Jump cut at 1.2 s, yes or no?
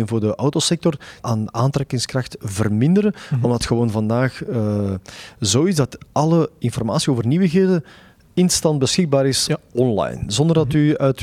yes